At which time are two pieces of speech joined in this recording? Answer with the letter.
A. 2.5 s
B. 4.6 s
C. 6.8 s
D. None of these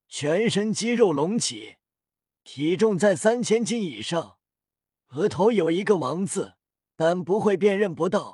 C